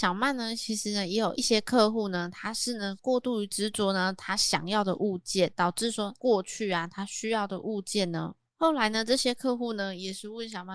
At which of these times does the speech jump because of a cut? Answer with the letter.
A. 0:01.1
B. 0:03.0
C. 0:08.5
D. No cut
C